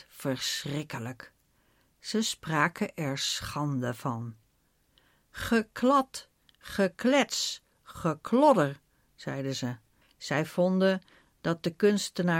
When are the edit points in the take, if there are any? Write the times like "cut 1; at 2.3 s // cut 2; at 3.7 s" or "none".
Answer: cut 1; at 10.0 s